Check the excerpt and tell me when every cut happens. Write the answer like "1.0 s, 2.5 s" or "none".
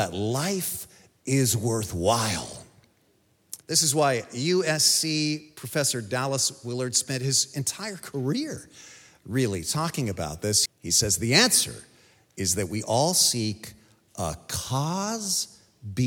3.6 s, 10.7 s